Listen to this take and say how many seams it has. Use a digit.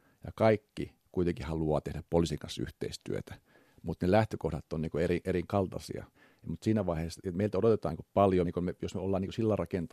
1